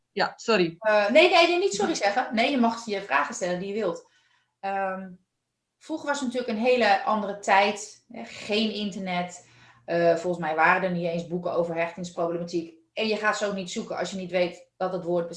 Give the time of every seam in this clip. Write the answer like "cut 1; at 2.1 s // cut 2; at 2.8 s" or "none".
none